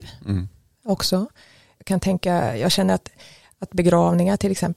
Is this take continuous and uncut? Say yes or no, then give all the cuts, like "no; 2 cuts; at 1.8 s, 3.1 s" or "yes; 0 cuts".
no; 1 cut; at 1.8 s